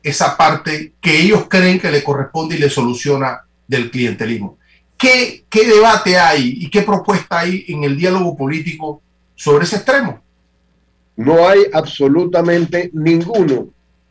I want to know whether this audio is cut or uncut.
uncut